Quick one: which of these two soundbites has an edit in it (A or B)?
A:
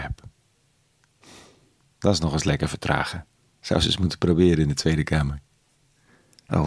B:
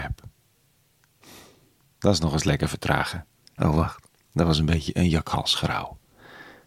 B